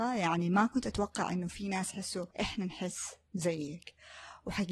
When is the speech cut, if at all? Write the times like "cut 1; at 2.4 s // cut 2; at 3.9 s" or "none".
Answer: cut 1; at 2.3 s